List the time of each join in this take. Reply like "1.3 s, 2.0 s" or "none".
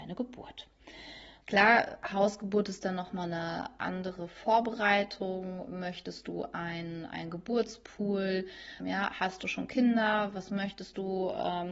1.4 s, 8.8 s